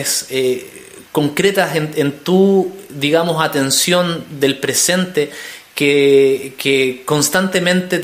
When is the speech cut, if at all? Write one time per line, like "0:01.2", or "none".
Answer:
0:01.1